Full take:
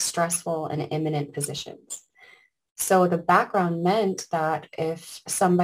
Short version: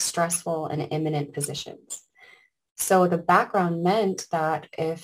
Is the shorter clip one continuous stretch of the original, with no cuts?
yes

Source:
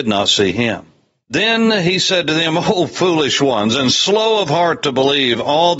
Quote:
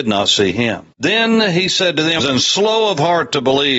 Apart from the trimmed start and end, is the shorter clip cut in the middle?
yes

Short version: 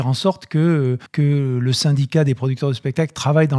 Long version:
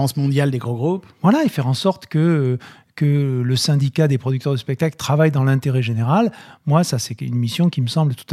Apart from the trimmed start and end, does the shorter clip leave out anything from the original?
yes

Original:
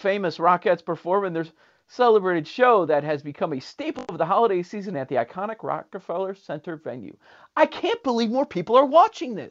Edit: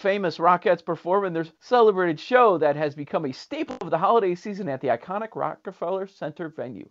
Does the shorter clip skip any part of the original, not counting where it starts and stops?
yes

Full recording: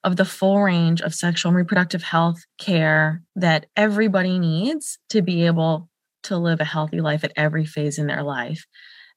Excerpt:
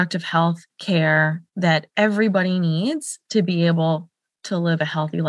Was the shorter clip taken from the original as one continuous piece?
yes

